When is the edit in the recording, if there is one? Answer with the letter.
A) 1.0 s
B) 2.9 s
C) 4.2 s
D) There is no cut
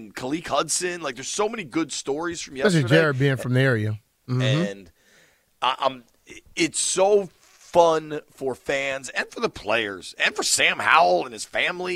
C